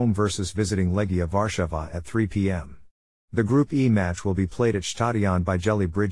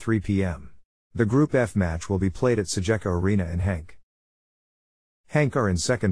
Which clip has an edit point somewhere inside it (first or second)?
second